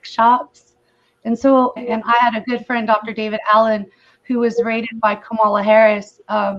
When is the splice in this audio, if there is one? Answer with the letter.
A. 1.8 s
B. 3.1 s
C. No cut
A